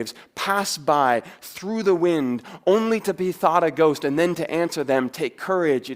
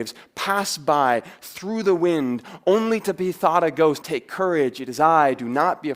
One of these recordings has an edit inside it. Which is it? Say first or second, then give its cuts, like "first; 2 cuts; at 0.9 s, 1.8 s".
second; 1 cut; at 4.0 s